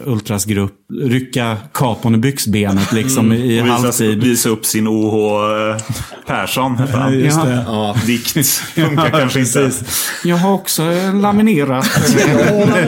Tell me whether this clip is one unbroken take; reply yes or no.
yes